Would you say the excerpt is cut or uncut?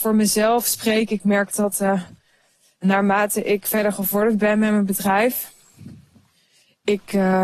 uncut